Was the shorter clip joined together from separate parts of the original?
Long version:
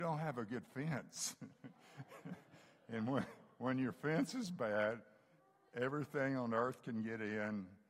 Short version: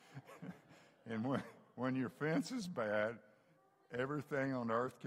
no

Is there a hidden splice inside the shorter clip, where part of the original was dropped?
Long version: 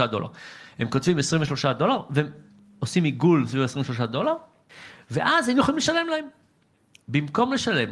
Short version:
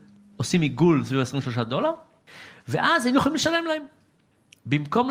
no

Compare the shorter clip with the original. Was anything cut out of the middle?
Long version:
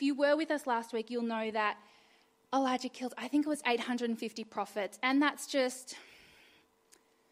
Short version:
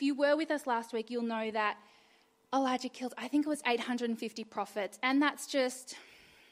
no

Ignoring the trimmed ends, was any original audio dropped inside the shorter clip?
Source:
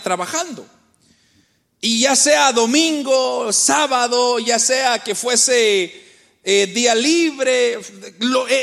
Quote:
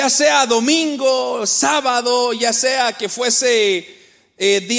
no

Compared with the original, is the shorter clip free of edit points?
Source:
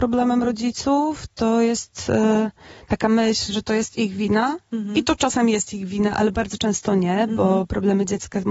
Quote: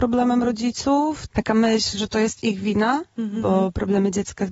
no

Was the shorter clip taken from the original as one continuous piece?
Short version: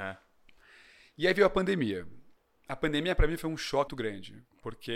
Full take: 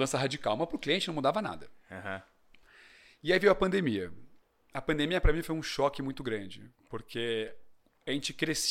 no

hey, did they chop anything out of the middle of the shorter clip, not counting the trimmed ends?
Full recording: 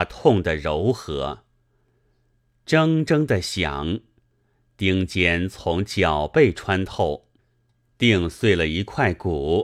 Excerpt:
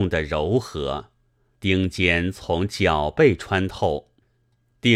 yes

